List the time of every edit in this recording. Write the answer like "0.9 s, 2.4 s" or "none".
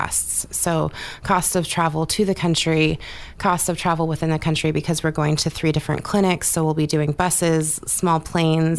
none